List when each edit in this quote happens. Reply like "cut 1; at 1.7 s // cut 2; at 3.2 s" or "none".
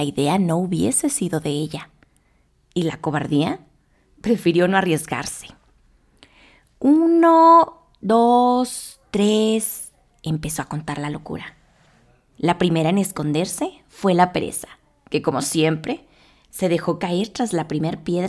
none